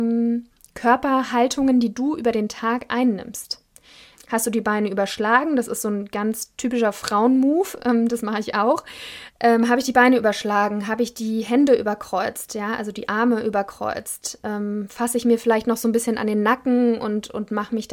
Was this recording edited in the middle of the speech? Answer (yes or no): yes